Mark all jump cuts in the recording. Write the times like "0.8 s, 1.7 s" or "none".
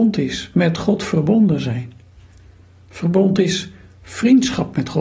none